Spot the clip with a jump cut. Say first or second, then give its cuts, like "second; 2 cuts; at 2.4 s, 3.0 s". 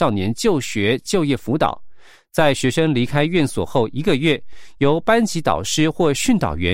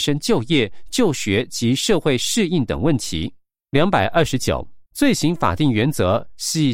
second; 2 cuts; at 3.6 s, 4.9 s